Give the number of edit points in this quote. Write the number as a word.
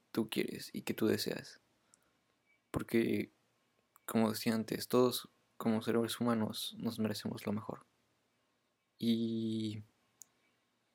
zero